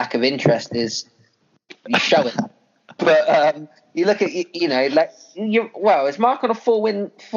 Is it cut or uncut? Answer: uncut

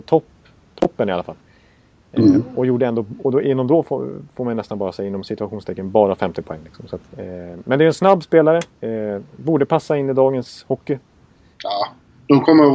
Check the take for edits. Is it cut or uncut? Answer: cut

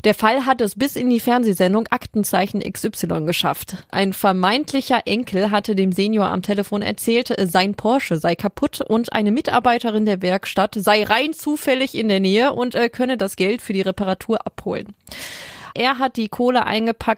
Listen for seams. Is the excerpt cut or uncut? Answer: cut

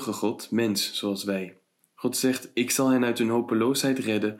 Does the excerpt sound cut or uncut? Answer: cut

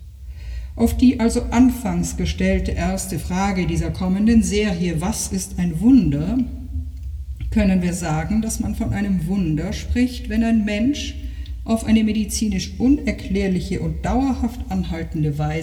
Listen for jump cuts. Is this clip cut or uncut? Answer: uncut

